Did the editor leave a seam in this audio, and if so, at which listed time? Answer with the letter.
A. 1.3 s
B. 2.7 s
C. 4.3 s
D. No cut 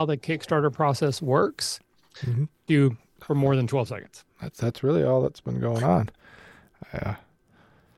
B